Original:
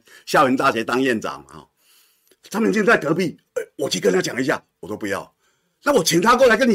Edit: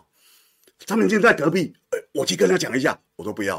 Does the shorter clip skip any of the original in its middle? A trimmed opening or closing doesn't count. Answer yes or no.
no